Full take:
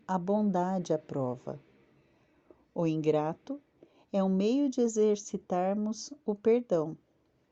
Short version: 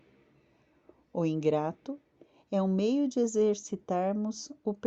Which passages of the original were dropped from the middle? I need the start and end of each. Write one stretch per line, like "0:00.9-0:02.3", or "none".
none